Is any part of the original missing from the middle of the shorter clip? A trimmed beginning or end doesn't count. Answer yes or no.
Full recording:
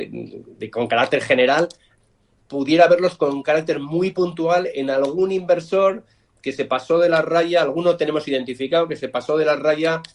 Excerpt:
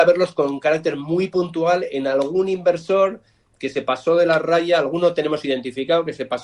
no